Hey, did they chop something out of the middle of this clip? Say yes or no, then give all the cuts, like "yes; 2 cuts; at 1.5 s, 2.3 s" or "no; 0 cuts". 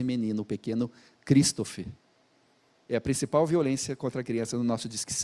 yes; 1 cut; at 2.9 s